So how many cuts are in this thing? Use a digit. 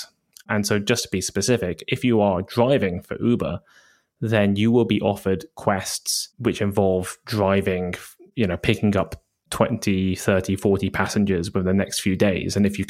0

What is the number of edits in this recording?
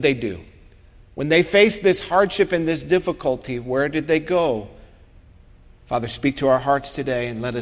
1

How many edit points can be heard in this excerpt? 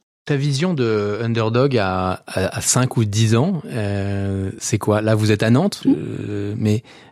1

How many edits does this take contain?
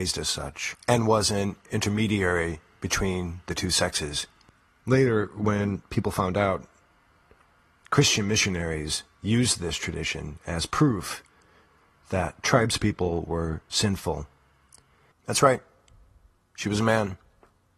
2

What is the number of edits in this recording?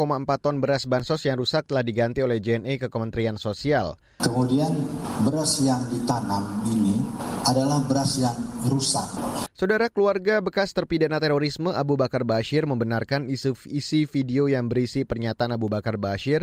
2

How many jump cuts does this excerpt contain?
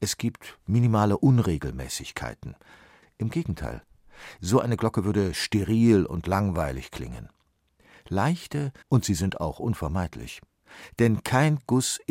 2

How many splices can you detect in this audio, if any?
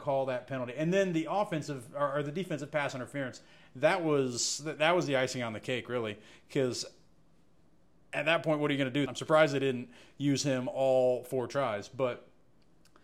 2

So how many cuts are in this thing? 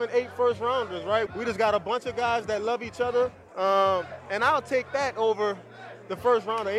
2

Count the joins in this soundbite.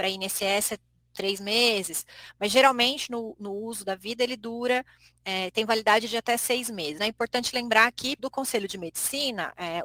2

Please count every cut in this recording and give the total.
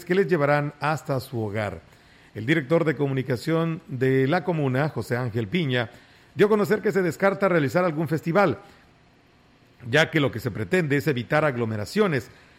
0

